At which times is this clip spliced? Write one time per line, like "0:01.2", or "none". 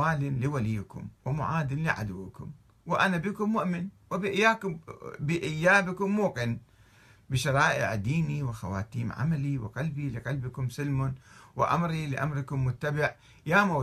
none